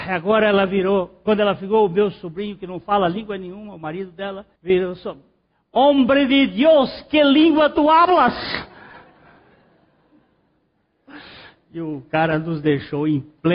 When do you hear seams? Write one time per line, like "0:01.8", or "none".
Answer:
0:04.6